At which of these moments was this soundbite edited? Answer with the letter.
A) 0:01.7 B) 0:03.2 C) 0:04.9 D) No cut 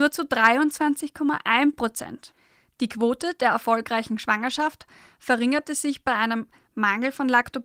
D